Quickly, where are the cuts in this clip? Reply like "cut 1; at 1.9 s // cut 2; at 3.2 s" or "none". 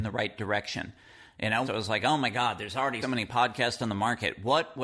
cut 1; at 1.6 s // cut 2; at 3.0 s

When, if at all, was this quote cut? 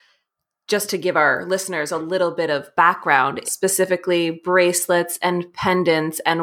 cut 1; at 3.4 s

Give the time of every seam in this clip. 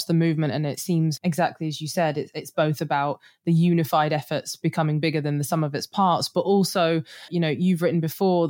cut 1; at 1.2 s // cut 2; at 7.3 s

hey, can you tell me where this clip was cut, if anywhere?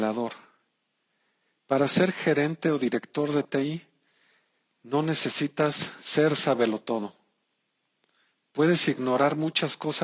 none

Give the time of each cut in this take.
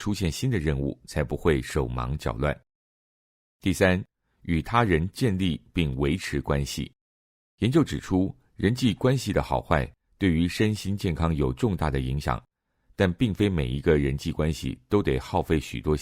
none

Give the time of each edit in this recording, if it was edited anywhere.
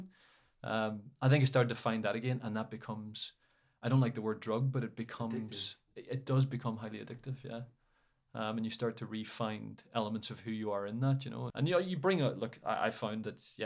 cut 1; at 11.5 s

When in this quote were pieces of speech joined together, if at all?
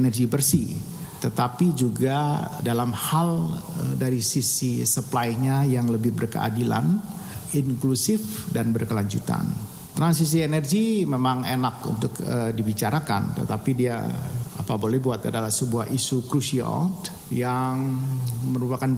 cut 1; at 2.6 s

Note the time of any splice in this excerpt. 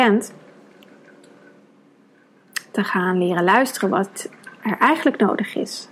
none

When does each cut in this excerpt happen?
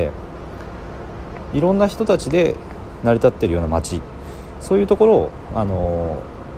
none

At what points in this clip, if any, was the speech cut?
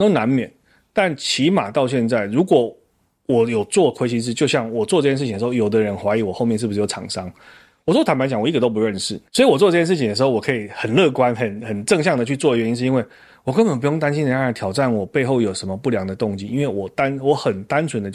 cut 1; at 9.3 s

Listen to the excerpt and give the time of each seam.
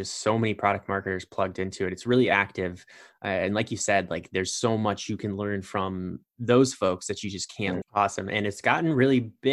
cut 1; at 7.8 s

